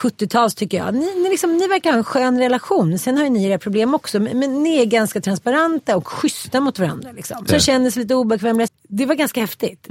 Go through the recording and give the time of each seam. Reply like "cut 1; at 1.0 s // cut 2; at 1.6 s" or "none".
cut 1; at 7.5 s // cut 2; at 8.7 s